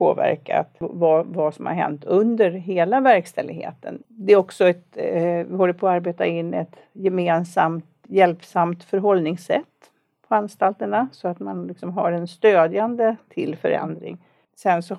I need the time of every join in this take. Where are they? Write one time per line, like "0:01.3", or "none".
0:04.0